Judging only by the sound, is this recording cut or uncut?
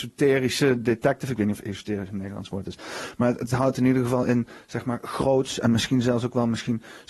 uncut